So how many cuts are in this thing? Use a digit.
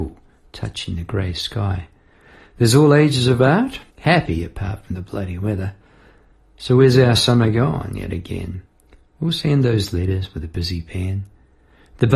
1